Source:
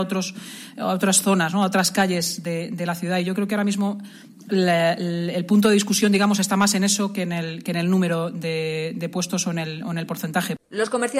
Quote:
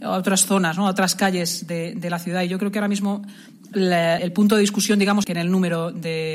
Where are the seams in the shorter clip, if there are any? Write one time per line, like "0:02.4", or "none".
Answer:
0:04.2
0:05.2